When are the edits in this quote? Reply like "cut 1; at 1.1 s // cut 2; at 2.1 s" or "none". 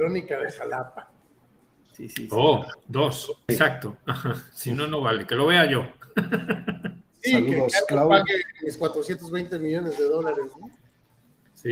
cut 1; at 3.5 s